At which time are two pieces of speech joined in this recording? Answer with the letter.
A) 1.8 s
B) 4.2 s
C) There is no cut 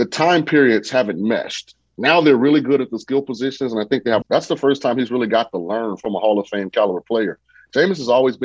B